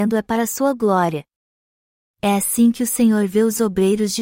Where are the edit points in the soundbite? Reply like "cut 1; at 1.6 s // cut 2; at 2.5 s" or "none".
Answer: none